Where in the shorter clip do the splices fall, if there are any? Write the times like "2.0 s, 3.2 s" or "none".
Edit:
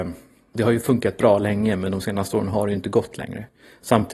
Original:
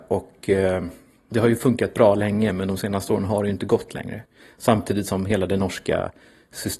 none